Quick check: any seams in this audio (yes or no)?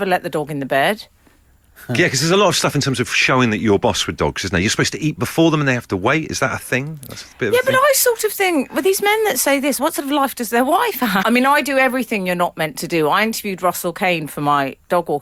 yes